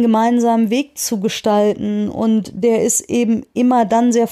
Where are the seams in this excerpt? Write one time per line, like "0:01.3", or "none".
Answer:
none